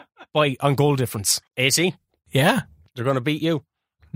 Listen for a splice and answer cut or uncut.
cut